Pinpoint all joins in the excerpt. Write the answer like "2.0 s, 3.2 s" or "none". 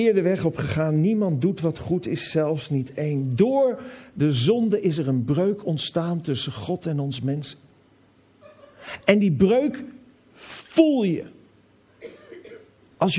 none